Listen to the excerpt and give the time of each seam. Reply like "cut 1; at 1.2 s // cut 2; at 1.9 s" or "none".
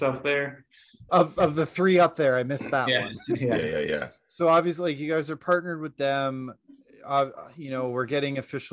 cut 1; at 1.1 s